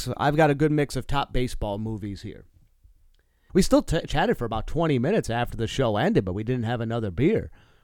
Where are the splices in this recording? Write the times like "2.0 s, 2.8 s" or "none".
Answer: 3.5 s